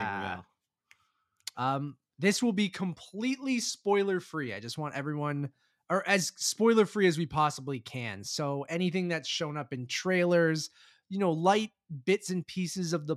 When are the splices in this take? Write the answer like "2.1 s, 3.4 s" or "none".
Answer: 1.5 s